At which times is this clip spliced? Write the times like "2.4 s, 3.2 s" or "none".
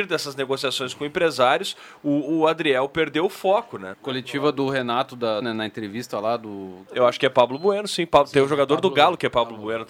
3.9 s, 5.4 s, 6.9 s